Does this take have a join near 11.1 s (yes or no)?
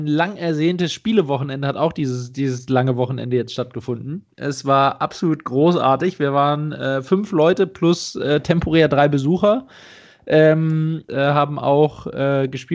yes